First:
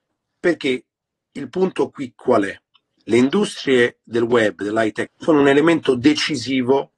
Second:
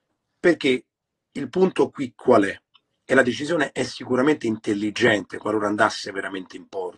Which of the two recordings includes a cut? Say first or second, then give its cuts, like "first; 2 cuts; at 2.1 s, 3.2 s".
first; 2 cuts; at 3.0 s, 5.1 s